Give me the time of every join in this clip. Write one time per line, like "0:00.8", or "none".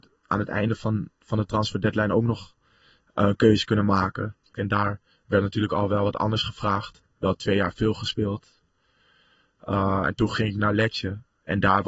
0:04.5